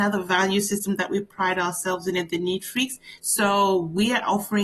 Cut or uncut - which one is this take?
cut